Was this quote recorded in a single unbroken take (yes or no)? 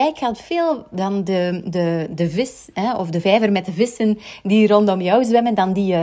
no